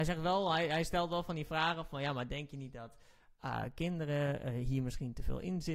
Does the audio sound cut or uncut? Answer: uncut